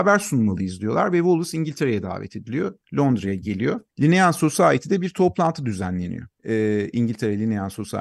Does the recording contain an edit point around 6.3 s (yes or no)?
yes